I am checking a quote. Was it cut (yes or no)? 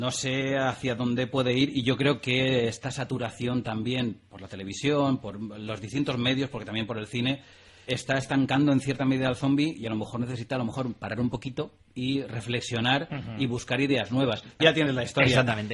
yes